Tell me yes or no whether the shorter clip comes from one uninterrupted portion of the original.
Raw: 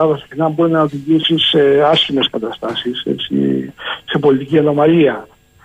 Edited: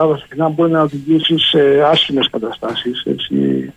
yes